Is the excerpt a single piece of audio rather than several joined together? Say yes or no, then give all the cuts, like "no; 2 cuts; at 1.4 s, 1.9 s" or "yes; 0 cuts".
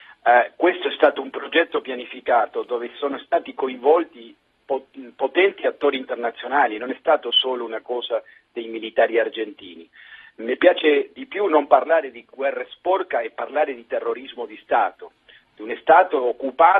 yes; 0 cuts